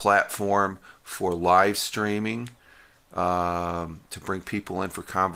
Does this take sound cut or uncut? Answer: uncut